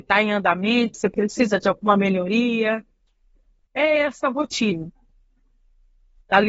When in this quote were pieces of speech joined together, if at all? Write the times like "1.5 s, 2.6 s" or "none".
0.9 s, 3.7 s